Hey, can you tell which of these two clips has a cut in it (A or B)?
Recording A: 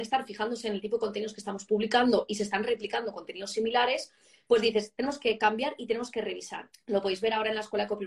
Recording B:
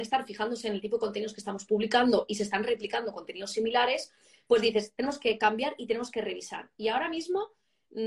A